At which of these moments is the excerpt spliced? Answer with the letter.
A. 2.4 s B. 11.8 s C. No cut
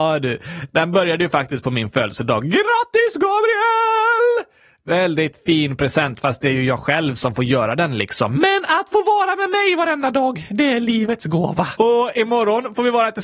B